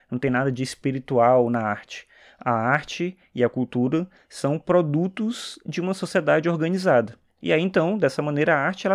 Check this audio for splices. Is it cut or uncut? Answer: uncut